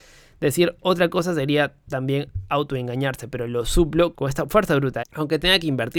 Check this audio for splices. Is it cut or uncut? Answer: cut